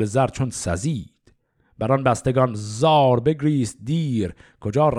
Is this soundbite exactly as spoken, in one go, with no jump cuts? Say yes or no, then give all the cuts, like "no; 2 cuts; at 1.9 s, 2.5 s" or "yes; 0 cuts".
yes; 0 cuts